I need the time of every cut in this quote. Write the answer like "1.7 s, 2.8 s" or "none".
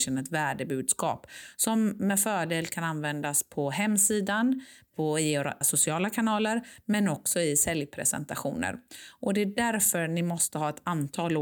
5.6 s